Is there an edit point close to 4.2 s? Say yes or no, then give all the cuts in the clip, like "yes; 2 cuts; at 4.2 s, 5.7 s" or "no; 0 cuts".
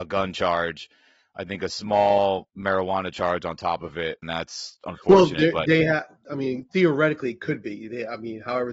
yes; 1 cut; at 4.2 s